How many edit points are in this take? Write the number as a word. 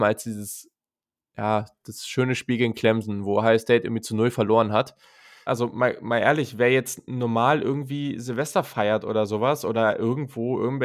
one